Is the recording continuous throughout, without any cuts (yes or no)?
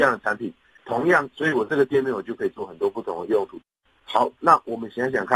no